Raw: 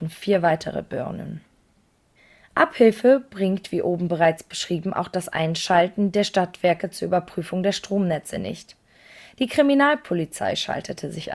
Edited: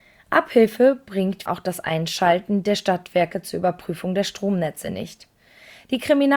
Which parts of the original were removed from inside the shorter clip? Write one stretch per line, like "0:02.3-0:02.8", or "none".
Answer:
0:03.7-0:04.9